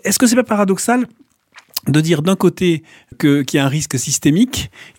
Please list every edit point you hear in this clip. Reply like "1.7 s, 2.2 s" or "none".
3.1 s